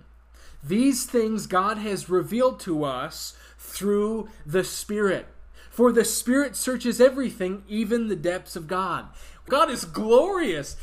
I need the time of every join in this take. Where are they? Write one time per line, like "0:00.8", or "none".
0:09.5